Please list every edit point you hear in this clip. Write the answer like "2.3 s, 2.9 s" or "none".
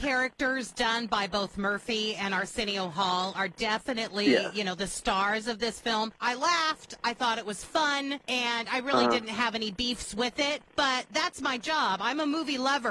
6.2 s